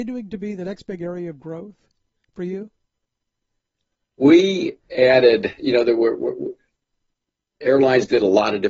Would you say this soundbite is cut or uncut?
uncut